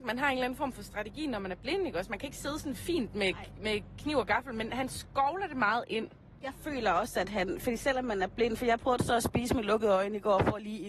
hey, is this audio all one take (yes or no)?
yes